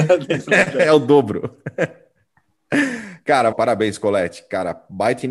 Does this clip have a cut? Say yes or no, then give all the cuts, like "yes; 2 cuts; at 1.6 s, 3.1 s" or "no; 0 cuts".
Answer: yes; 1 cut; at 3.5 s